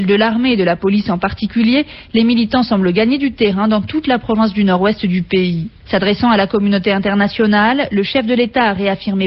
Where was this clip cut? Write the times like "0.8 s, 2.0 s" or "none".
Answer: 5.8 s